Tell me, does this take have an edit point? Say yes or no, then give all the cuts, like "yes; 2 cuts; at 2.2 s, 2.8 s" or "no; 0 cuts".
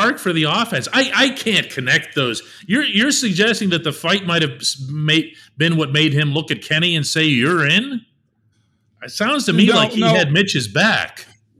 no; 0 cuts